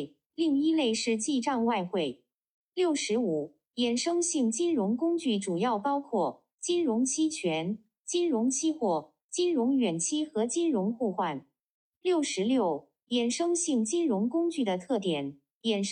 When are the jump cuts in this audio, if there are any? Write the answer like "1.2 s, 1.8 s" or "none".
none